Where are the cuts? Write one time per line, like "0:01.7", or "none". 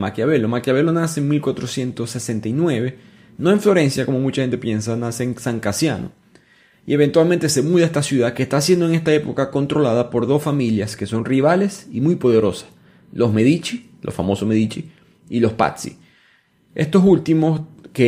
none